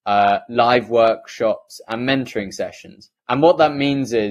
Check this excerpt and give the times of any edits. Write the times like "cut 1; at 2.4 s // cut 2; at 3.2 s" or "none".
cut 1; at 3.2 s